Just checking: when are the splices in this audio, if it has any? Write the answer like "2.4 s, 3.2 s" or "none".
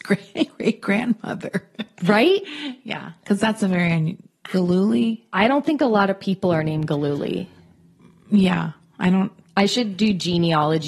none